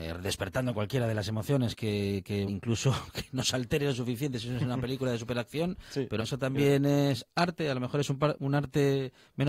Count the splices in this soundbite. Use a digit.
3